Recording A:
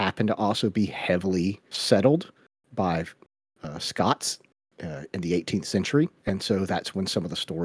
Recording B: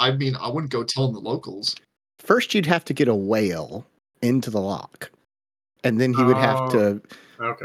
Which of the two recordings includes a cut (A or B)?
A